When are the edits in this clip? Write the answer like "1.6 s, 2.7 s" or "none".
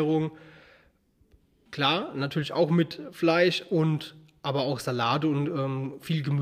1.7 s